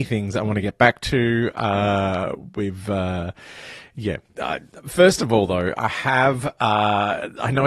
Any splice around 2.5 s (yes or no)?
no